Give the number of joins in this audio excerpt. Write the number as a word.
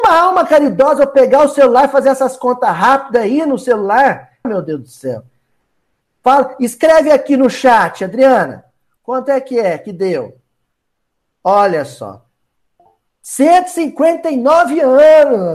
one